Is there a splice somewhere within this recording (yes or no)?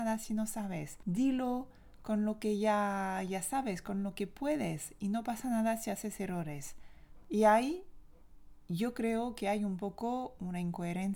yes